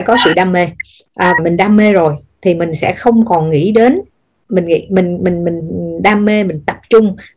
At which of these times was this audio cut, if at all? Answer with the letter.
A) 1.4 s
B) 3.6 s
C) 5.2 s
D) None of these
A